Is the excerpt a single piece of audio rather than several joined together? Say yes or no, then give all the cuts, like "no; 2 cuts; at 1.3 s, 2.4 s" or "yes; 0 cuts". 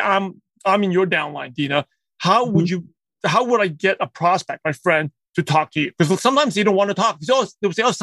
yes; 0 cuts